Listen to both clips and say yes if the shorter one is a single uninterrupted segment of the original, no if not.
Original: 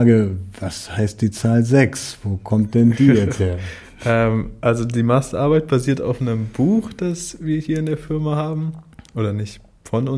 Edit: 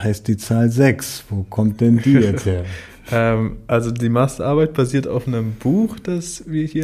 yes